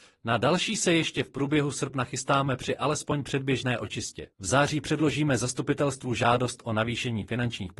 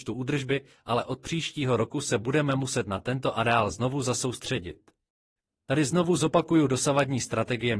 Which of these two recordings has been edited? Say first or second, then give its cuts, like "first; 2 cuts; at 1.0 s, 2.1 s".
first; 1 cut; at 4.3 s